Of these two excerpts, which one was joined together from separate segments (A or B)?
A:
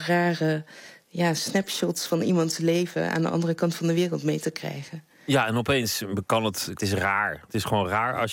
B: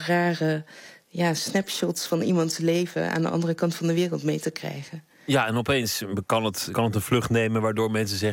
A